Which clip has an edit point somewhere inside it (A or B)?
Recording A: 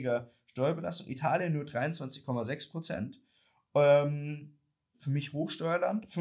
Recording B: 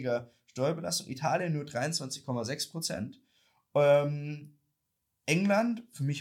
A